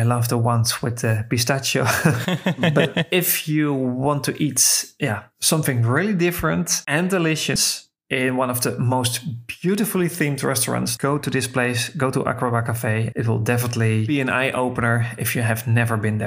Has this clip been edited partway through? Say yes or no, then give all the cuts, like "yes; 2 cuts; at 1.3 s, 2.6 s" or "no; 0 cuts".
yes; 2 cuts; at 11.0 s, 13.1 s